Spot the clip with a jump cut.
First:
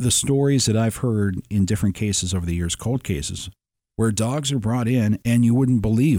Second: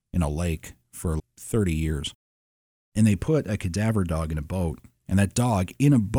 second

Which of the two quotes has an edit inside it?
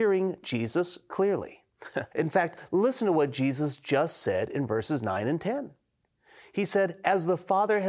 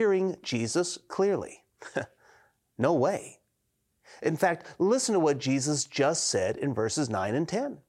first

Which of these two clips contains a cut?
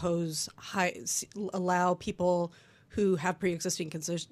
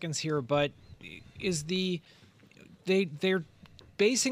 second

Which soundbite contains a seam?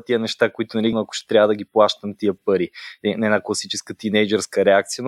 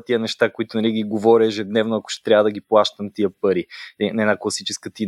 first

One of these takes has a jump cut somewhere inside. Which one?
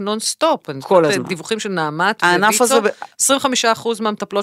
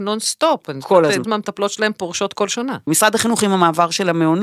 second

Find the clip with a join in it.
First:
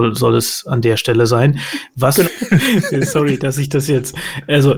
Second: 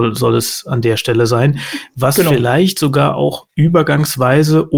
first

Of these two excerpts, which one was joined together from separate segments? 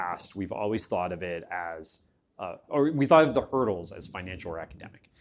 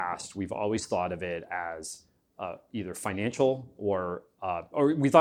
first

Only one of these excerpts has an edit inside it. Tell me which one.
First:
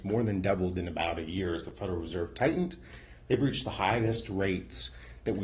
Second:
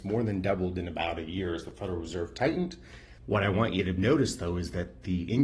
second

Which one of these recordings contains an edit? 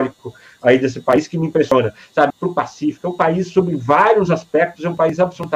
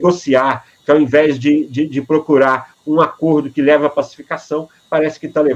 first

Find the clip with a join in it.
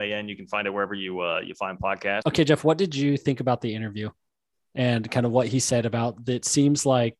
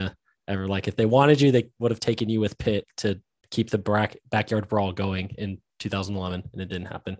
first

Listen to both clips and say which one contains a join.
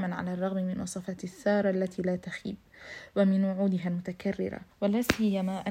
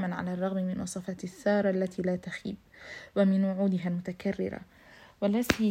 first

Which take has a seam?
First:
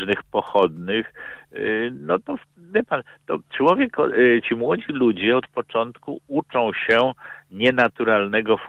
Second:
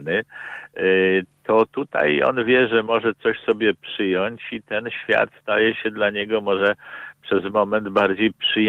first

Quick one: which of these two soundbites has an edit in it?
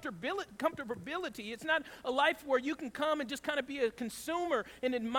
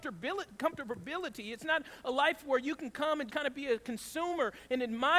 second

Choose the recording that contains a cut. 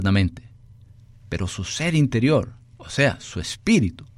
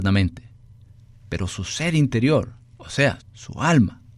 second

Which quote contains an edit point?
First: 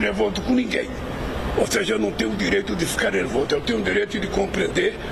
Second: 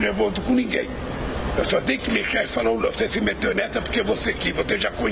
second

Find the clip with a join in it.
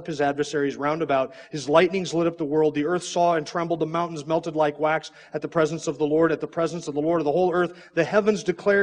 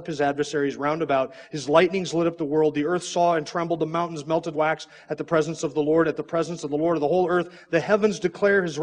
second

